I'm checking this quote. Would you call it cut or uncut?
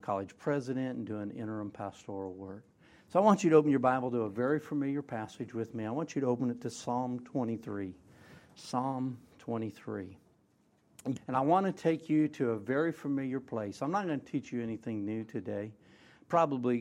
cut